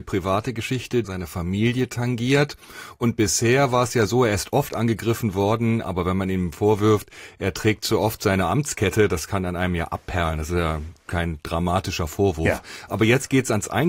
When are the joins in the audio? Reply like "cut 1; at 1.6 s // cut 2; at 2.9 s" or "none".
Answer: cut 1; at 1.0 s